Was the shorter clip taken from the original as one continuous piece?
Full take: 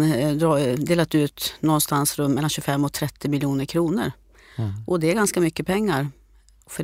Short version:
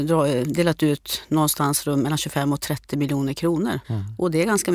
no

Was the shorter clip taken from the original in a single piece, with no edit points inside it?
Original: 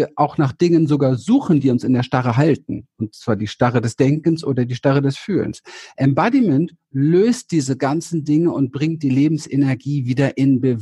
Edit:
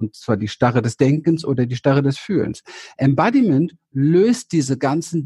yes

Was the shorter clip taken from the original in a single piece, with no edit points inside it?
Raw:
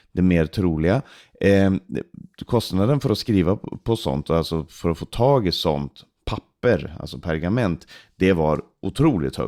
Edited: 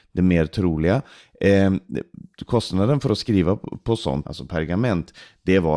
no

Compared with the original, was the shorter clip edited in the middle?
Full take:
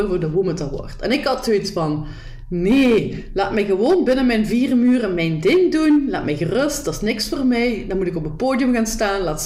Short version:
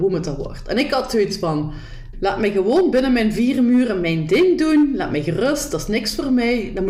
yes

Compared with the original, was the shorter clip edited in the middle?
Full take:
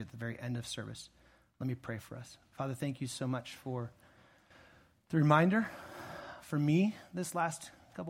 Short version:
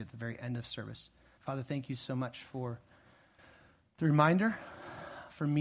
yes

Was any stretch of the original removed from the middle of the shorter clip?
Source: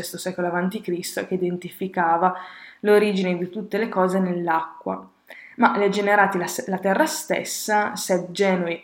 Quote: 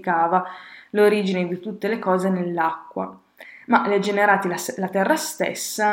no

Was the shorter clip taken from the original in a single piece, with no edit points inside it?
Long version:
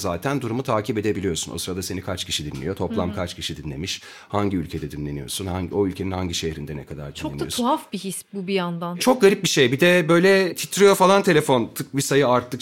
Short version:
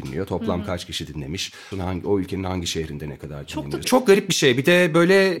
no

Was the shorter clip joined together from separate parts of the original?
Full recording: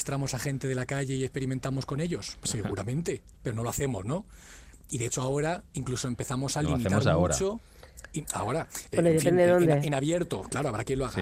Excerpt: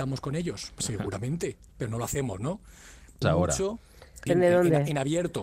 yes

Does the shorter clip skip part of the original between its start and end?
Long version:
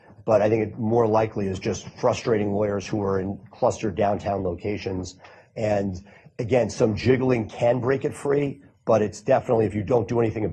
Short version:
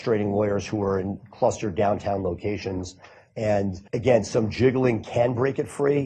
yes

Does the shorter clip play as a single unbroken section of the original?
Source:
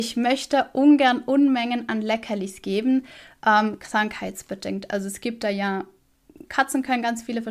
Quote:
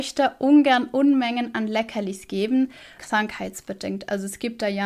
no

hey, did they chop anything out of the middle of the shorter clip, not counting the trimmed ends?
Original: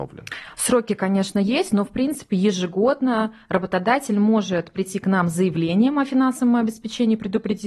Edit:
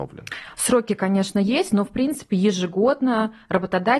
no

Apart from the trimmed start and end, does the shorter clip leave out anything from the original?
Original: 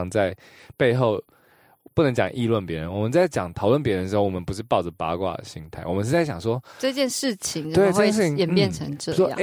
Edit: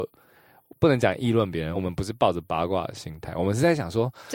yes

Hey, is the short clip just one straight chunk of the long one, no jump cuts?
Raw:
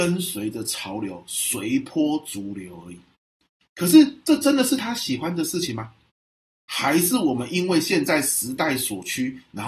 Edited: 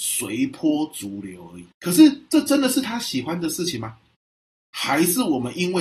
no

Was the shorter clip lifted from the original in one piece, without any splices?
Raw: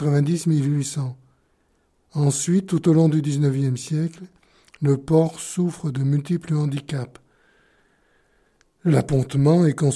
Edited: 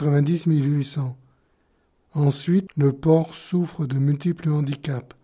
no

